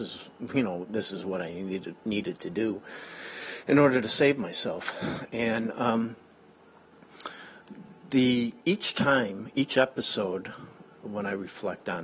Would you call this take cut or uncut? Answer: uncut